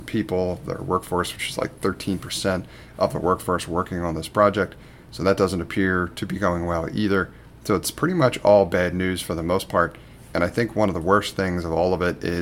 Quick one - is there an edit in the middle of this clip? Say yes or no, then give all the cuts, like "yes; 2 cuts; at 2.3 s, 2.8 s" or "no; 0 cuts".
no; 0 cuts